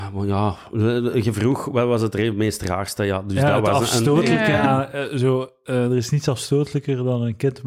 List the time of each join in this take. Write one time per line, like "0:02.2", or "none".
none